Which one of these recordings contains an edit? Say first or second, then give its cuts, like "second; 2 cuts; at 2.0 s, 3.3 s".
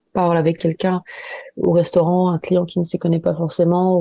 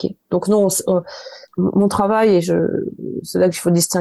second; 1 cut; at 1.4 s